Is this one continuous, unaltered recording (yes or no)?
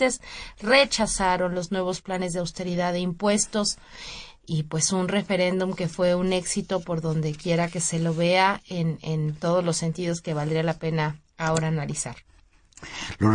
yes